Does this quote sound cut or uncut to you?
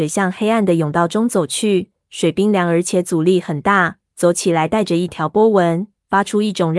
cut